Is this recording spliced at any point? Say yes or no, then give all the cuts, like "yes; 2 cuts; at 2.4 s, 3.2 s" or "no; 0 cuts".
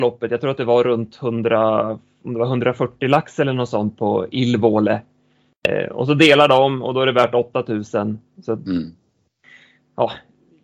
no; 0 cuts